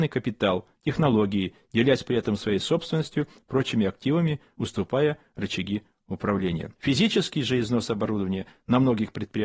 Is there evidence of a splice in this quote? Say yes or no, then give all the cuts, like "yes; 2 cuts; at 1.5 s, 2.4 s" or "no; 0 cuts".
yes; 1 cut; at 6.8 s